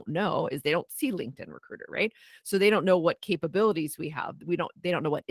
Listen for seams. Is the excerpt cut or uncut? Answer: uncut